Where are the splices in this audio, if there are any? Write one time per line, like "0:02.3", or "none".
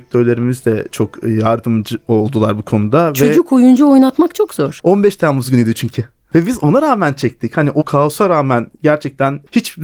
0:04.8